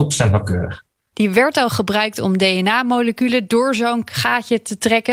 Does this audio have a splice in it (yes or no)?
yes